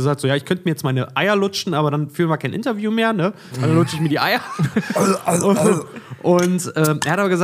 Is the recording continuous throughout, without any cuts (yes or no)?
yes